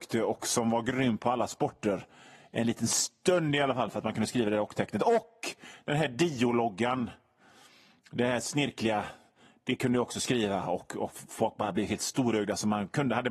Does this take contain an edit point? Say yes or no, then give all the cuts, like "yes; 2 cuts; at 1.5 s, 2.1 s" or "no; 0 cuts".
no; 0 cuts